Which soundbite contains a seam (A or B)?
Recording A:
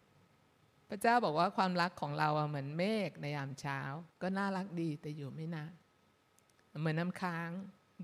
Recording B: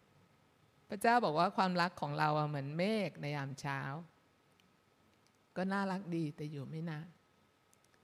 A